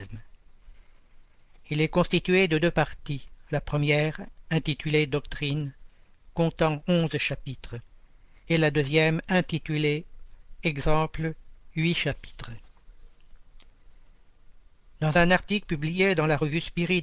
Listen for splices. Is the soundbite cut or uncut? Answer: uncut